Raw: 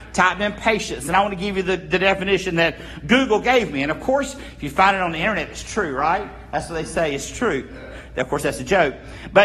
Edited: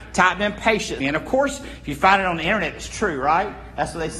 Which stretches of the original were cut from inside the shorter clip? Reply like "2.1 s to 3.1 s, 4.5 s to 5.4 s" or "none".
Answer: 1.0 s to 3.8 s